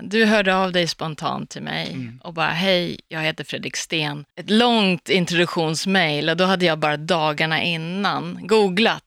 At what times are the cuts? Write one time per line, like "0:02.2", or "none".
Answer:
0:04.3